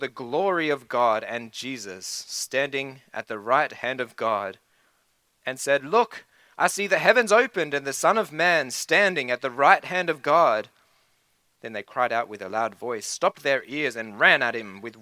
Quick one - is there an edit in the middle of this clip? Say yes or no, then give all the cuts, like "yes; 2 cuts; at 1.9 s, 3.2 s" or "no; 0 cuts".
no; 0 cuts